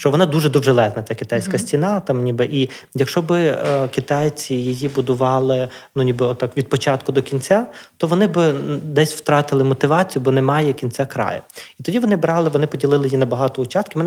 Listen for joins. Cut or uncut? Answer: uncut